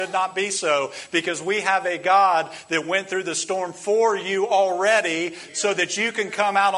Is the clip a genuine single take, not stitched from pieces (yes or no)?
yes